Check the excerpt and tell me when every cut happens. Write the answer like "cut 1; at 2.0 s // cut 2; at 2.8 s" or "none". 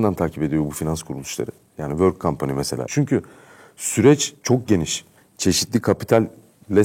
cut 1; at 2.9 s // cut 2; at 5.2 s